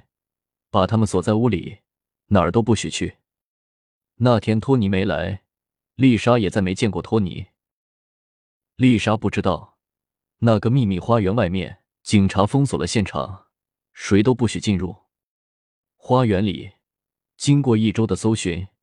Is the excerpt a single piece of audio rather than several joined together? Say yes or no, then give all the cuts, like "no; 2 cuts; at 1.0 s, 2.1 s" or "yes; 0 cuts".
no; 2 cuts; at 11.9 s, 17.3 s